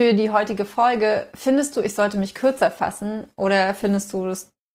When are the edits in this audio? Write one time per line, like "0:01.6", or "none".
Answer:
none